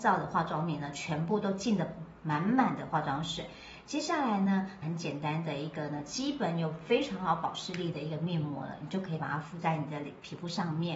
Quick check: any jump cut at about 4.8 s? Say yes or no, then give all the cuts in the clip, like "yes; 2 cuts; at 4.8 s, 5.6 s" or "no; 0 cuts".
yes; 1 cut; at 4.8 s